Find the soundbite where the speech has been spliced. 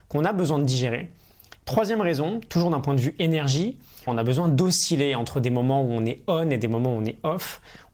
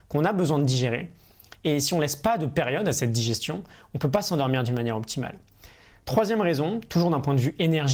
first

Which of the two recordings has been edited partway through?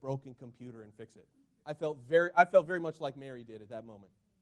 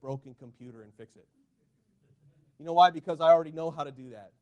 first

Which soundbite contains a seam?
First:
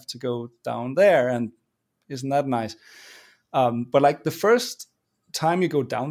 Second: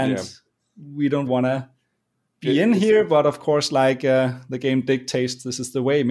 second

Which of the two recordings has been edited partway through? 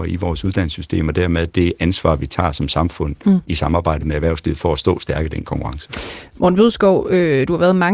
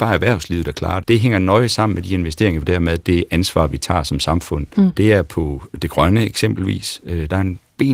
second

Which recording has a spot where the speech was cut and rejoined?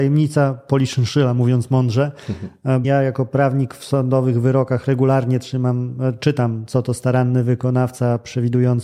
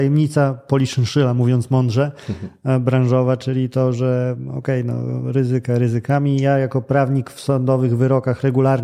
first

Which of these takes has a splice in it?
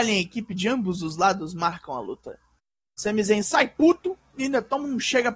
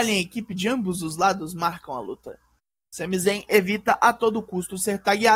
first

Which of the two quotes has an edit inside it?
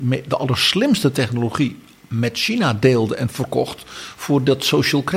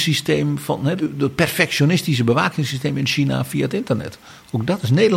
second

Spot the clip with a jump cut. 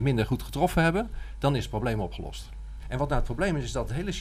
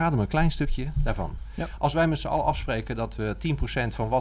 first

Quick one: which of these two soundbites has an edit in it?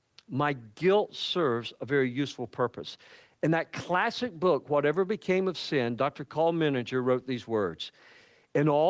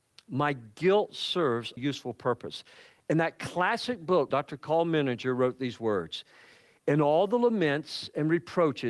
second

